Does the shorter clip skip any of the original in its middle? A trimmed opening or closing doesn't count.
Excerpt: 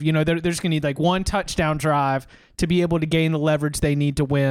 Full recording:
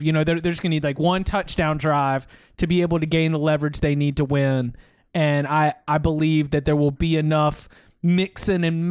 no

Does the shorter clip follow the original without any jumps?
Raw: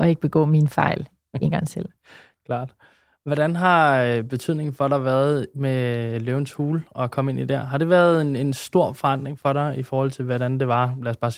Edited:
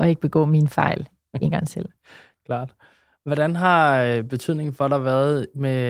yes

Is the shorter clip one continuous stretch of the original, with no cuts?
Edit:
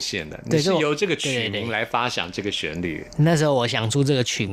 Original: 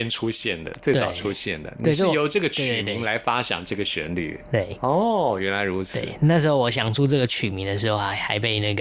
no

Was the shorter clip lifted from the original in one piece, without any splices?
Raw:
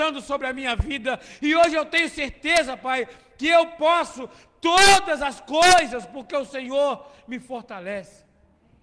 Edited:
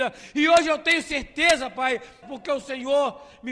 no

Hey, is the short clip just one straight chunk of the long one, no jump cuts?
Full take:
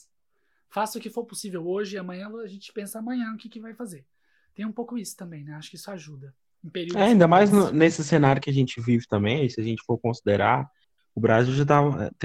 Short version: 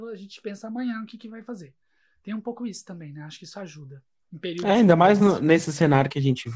yes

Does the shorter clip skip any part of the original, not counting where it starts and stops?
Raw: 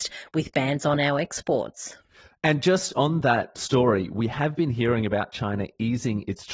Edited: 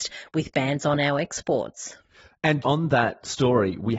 yes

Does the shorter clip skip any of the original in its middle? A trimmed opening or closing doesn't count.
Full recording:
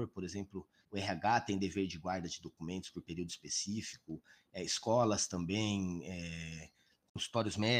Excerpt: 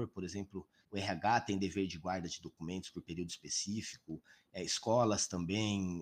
no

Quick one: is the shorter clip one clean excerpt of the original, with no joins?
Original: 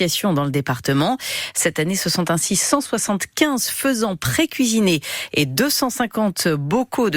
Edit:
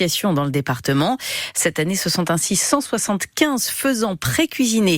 yes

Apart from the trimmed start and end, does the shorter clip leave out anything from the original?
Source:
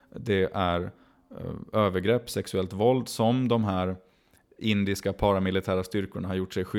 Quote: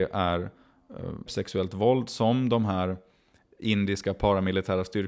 yes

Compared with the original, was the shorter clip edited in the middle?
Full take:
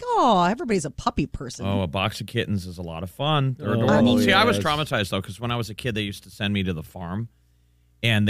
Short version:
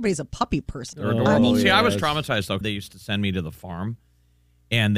yes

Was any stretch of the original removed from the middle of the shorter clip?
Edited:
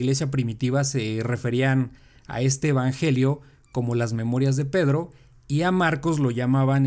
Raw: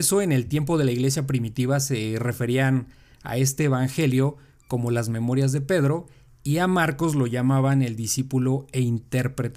no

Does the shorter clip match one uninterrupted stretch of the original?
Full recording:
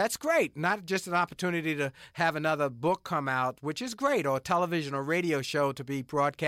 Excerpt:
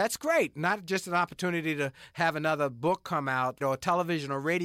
no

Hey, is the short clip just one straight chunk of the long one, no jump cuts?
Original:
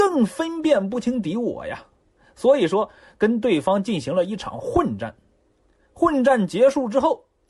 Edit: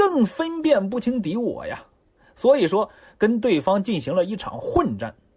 yes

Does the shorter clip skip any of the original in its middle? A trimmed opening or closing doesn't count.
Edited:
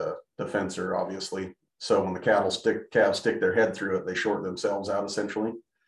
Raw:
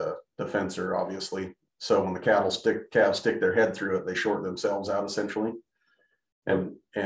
no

